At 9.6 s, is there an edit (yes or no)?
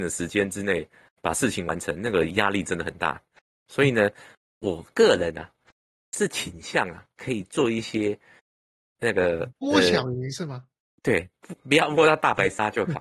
yes